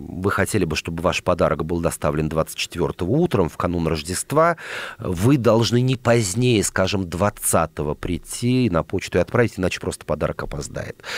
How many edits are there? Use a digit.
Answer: 0